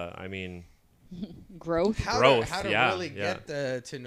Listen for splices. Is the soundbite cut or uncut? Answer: uncut